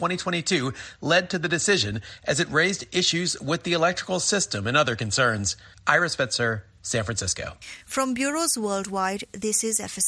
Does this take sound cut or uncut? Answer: uncut